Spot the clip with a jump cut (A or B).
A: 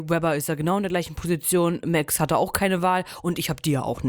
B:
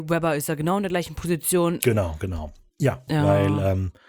B